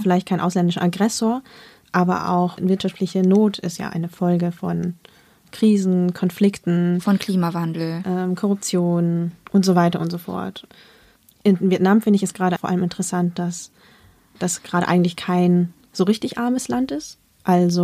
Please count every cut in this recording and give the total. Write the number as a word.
one